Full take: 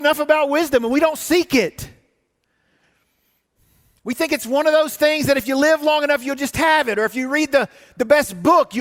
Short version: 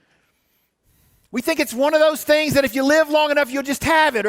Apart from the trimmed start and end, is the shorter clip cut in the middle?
no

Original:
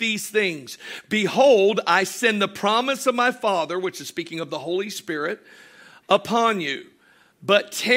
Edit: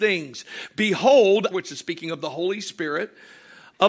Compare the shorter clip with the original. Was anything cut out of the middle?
yes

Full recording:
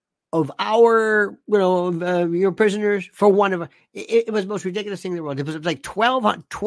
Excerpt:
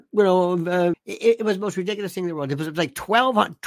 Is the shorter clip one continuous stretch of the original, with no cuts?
no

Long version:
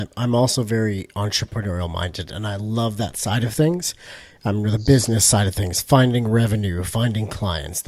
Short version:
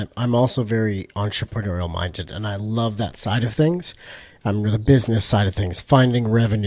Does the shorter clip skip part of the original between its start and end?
no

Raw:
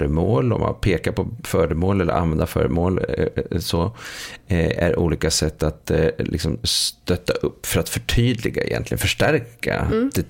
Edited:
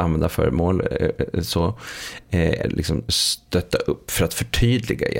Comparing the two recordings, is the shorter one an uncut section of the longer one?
no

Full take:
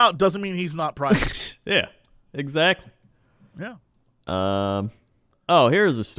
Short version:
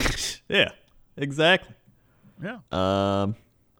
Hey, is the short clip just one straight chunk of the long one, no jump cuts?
no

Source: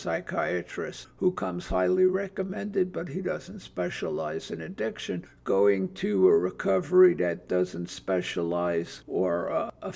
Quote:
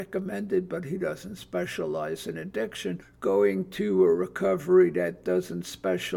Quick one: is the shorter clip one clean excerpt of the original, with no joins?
yes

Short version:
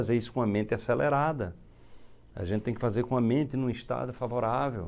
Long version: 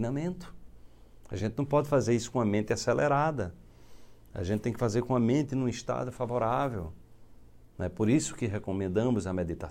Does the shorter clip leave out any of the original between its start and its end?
no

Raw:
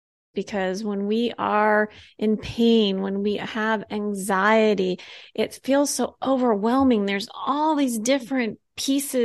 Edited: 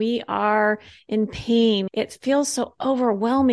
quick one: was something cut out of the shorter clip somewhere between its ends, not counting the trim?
yes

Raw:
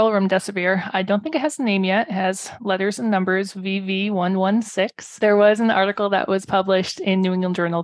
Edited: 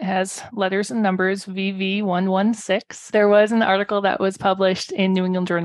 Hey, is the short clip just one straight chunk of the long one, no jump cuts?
yes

